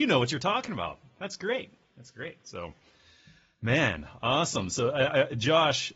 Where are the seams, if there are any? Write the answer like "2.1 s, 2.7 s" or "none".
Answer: none